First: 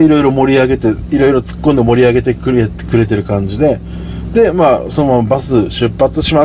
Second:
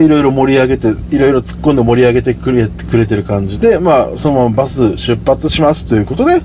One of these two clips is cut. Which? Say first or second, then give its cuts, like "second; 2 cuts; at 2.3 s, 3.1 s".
second; 1 cut; at 3.6 s